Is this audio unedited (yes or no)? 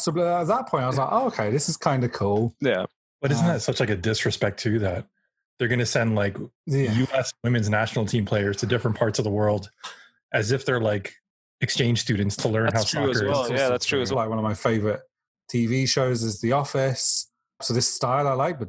no